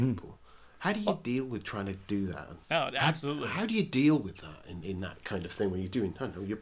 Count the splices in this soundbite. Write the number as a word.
one